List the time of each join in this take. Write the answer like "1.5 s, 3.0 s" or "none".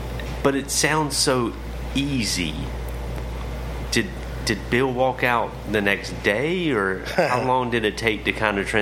none